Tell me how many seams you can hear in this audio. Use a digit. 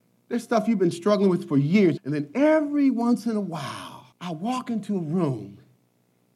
2